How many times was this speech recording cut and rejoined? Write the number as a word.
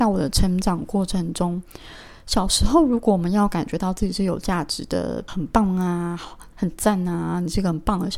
two